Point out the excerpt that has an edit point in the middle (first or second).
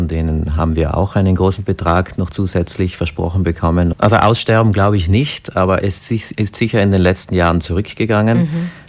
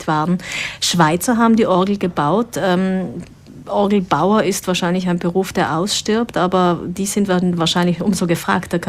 first